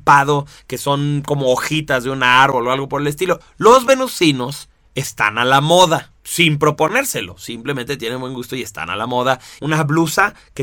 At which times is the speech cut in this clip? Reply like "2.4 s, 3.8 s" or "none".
3.4 s, 6.2 s, 9.6 s